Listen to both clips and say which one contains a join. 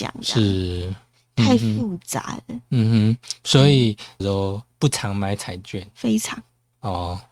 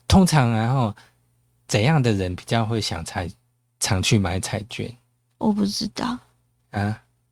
first; 1 cut; at 4.2 s

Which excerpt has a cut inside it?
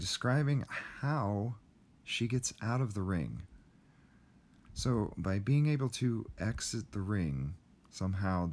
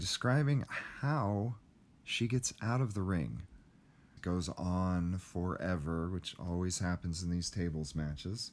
second; 1 cut; at 4.2 s

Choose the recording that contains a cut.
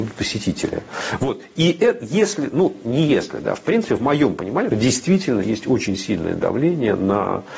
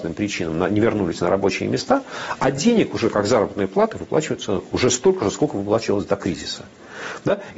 first; 1 cut; at 4.7 s

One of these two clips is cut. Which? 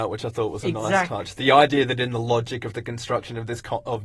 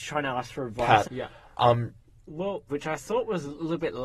second; 2 cuts; at 1.0 s, 2.7 s

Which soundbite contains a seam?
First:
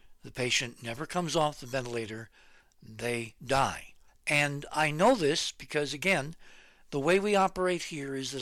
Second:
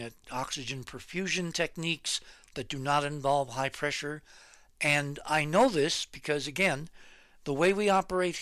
first; 1 cut; at 4.1 s

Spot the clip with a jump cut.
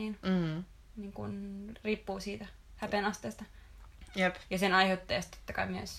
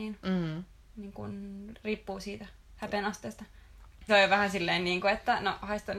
second; 1 cut; at 4.1 s

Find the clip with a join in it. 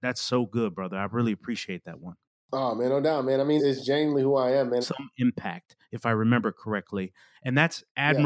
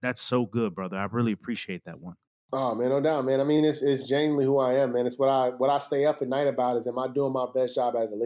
first; 2 cuts; at 3.6 s, 4.8 s

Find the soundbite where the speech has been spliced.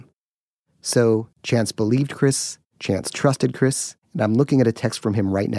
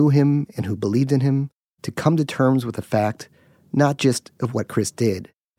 first; 1 cut; at 1.3 s

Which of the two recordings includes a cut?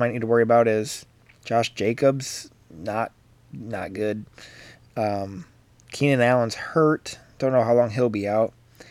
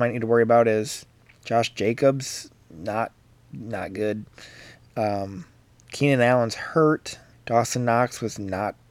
second; 1 cut; at 7.3 s

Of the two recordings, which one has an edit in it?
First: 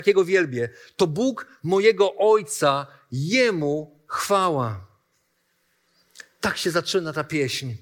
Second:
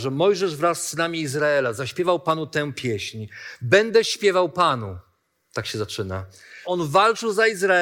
second; 1 cut; at 6.6 s

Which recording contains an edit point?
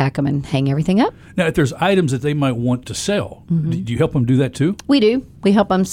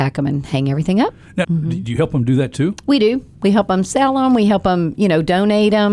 second; 1 cut; at 1.4 s

